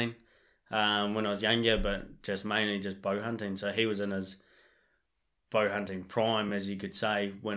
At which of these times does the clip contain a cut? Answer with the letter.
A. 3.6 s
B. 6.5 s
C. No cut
C